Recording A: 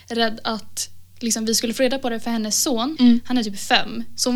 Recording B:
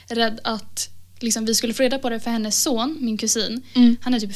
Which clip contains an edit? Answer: A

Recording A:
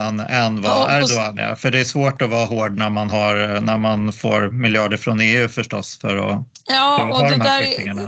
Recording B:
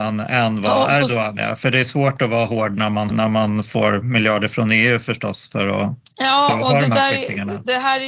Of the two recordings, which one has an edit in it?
B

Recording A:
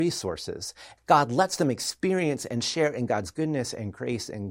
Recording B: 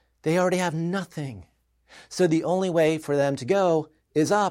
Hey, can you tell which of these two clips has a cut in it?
A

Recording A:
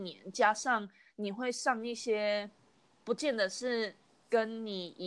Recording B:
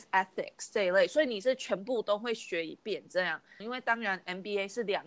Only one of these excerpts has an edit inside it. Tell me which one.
B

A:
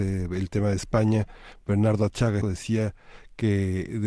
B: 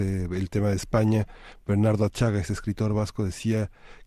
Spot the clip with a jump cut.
A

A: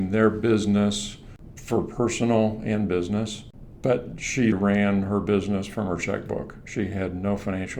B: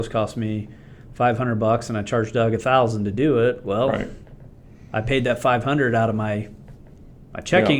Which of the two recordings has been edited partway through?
A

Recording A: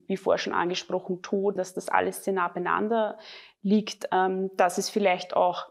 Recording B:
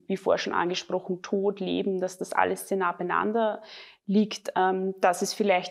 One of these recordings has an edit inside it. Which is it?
A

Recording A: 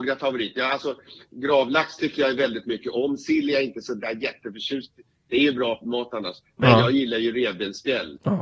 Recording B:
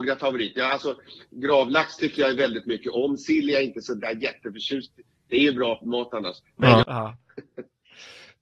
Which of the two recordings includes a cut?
B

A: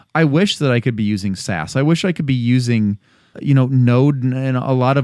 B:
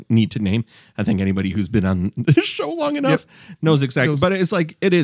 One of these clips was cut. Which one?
A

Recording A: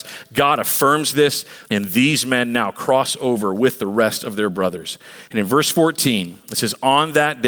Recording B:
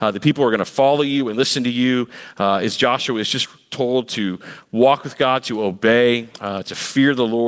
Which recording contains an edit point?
A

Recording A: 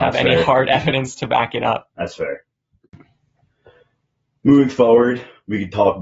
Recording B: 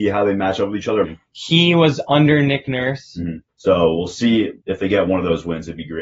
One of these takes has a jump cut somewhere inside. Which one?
B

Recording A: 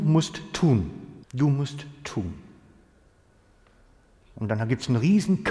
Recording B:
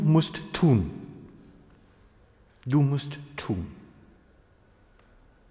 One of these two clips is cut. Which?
A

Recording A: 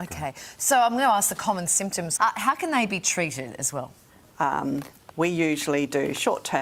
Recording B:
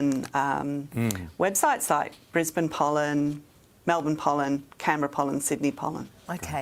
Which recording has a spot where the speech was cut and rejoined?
A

